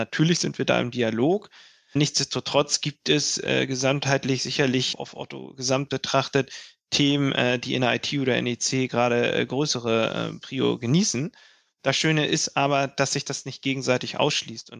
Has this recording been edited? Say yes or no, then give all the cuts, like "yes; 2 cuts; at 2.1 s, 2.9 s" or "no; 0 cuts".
no; 0 cuts